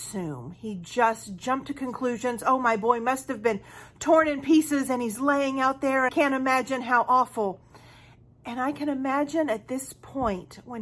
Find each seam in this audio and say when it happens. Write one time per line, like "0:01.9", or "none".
0:06.1